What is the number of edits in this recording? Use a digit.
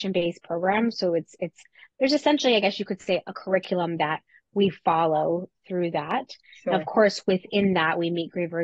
0